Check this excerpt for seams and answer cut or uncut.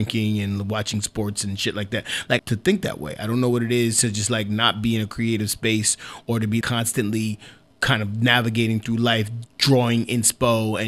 cut